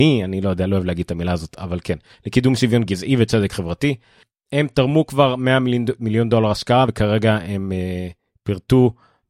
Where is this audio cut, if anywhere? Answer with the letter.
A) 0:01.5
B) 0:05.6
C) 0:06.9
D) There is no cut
D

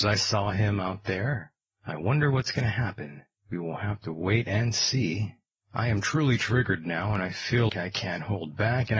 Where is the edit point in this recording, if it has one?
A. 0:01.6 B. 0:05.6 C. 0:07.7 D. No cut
C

